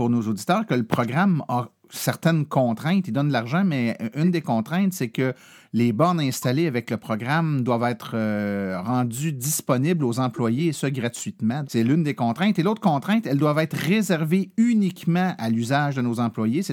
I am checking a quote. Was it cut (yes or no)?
yes